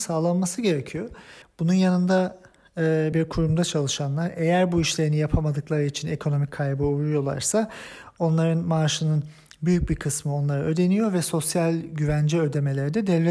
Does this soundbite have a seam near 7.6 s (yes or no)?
no